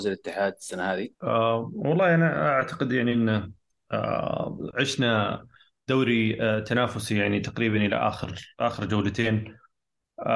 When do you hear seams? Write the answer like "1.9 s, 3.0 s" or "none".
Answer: 1.1 s